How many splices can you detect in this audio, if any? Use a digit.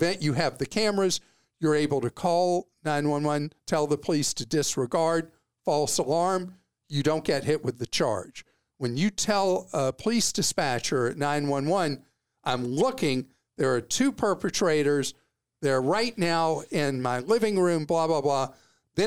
1